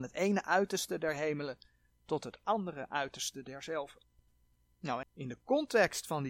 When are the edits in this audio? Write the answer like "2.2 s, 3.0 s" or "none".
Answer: 5.0 s